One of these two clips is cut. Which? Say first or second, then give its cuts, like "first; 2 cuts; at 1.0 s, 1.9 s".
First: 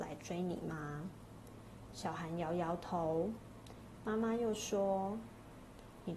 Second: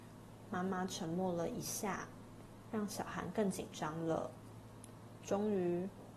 second; 1 cut; at 2.6 s